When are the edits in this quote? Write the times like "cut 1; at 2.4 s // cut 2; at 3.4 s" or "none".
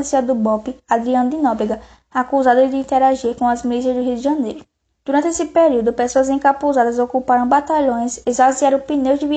cut 1; at 4.9 s